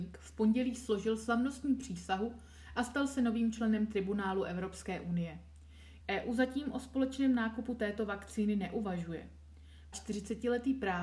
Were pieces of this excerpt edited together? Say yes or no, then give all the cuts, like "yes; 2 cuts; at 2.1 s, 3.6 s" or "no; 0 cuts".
yes; 2 cuts; at 6.0 s, 9.9 s